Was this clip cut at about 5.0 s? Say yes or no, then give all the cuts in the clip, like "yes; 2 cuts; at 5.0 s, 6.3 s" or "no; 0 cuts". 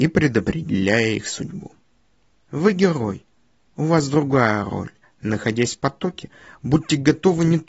yes; 2 cuts; at 2.3 s, 5.0 s